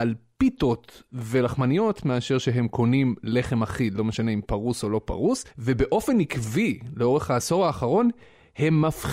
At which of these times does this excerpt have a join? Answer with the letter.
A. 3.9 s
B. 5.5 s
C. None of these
B